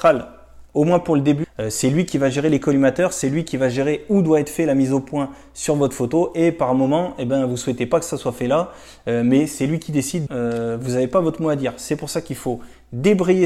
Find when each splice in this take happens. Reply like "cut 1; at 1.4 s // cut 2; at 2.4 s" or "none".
cut 1; at 1.4 s // cut 2; at 10.3 s